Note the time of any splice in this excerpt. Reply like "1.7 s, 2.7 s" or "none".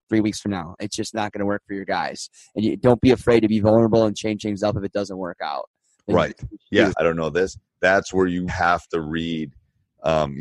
6.9 s, 8.5 s